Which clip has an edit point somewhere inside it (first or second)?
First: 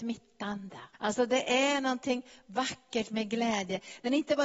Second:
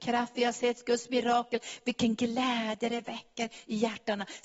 first